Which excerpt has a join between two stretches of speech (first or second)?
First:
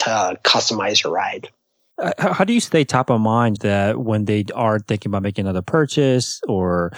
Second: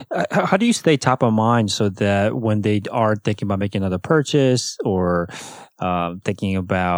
first